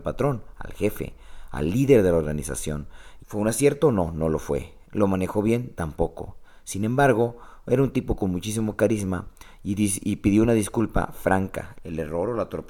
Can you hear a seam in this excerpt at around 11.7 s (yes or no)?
yes